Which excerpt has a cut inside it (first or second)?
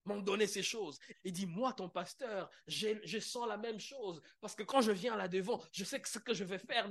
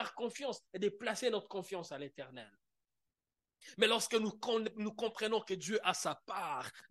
first